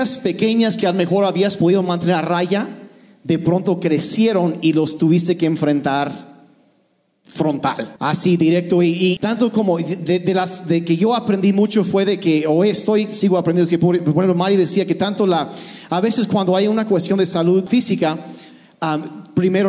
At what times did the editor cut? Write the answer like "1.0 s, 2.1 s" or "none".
8.0 s, 9.2 s, 17.7 s